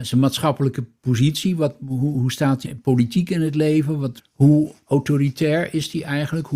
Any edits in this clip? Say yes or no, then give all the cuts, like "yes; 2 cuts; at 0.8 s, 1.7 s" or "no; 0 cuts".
yes; 2 cuts; at 2.6 s, 4.2 s